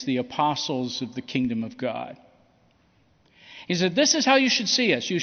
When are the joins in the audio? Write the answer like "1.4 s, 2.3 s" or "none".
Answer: none